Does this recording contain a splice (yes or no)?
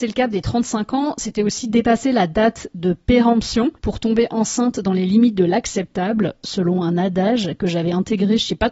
yes